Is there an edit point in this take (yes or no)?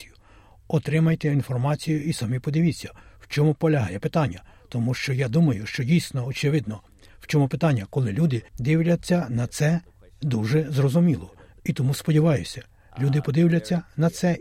yes